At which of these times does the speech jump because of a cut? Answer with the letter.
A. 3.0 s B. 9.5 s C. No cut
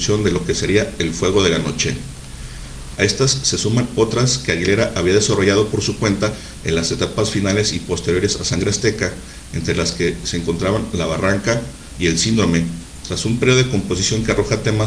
A